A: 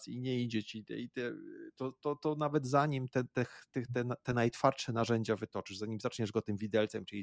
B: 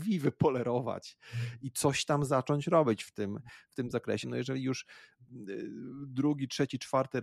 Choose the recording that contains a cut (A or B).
B